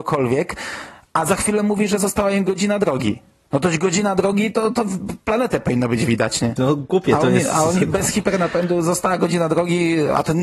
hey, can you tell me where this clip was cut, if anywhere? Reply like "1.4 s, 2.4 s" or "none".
6.6 s